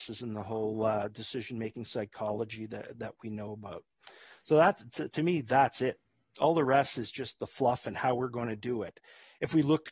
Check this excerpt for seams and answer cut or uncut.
uncut